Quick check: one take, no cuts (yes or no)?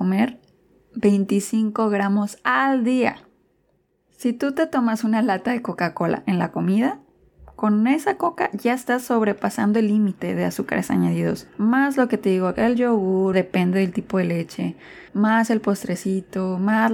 no